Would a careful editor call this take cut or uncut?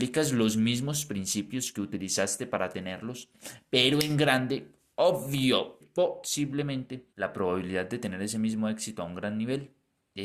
cut